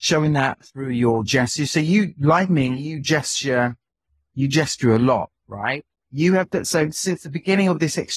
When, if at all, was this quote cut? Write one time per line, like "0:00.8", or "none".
0:05.9